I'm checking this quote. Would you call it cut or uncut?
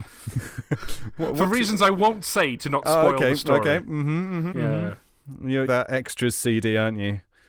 cut